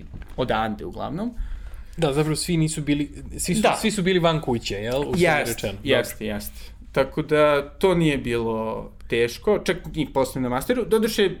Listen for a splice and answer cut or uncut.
uncut